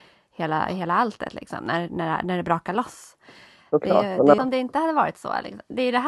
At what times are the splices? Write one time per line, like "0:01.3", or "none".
0:04.4